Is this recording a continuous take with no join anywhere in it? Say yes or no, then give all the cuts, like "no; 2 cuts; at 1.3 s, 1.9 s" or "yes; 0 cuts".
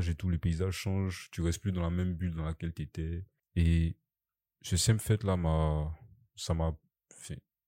no; 1 cut; at 3.4 s